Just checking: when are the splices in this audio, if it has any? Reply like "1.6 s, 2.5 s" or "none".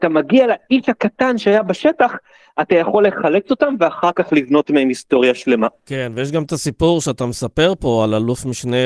none